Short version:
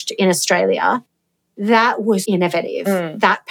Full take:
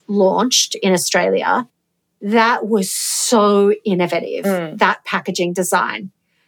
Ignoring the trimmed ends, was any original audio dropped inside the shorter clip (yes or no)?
yes